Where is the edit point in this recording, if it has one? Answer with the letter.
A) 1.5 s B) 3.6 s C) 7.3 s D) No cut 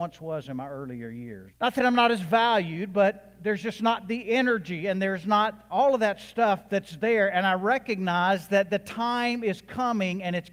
A